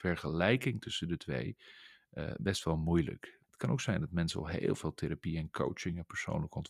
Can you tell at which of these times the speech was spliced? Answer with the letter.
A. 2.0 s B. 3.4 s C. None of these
B